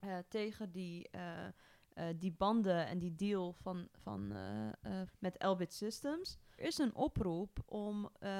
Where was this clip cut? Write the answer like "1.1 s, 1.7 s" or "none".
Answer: 5.1 s, 6.6 s